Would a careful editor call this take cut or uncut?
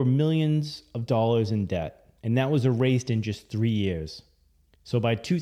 cut